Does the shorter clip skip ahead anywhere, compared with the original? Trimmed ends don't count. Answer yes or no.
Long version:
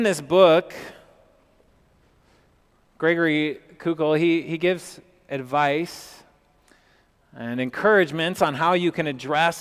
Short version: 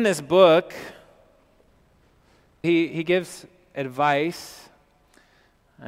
yes